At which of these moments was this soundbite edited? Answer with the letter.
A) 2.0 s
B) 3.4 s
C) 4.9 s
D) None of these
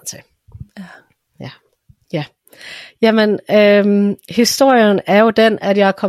A